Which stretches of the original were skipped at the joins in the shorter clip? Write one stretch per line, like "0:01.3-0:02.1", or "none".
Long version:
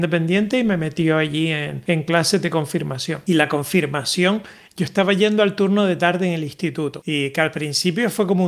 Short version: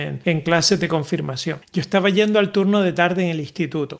0:03.2-0:04.7

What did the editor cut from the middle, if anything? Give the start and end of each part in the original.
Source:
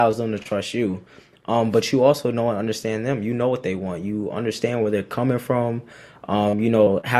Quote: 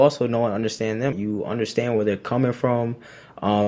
0:03.2-0:04.0

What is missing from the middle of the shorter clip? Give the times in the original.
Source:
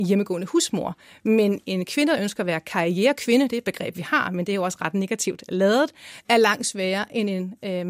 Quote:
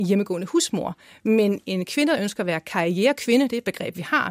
none

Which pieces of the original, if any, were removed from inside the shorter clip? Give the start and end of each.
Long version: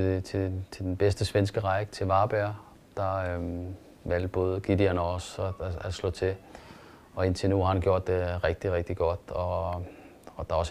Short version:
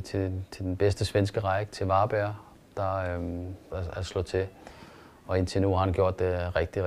0:03.9-0:05.6

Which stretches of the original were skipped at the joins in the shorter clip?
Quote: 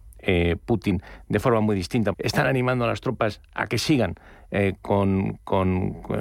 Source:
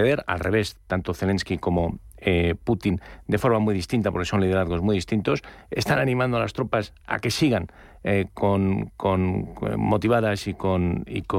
0:04.1-0:05.7

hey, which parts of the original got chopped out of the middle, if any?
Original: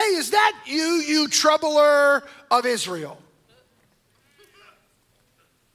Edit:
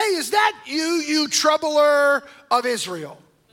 none

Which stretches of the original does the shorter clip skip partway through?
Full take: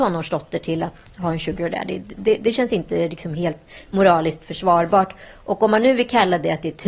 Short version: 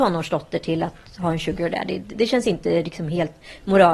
0:02.1-0:02.4

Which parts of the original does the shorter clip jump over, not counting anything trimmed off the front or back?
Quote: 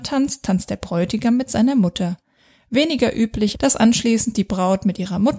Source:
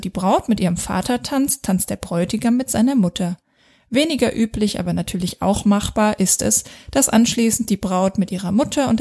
0:04.7-0:06.8

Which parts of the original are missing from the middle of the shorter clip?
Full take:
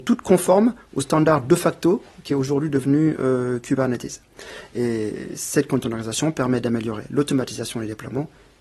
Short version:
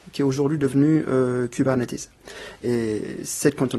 none

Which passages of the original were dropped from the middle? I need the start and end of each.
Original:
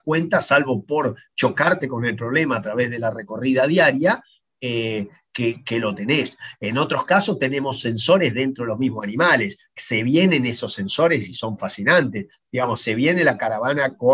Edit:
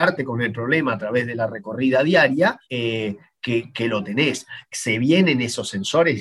0:04.3-0:04.5
0:06.6-0:09.7

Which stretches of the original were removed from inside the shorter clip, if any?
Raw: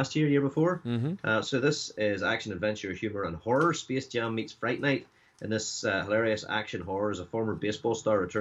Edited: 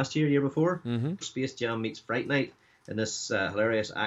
0:01.2-0:03.7

